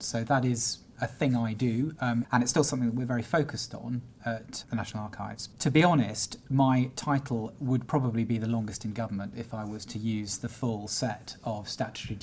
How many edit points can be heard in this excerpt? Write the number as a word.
one